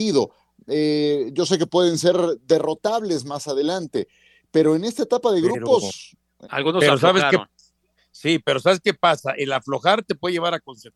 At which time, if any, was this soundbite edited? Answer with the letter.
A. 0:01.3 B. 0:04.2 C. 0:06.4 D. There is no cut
C